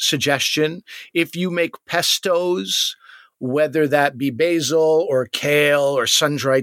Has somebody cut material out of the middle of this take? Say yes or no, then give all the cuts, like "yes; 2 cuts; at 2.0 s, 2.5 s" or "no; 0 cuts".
no; 0 cuts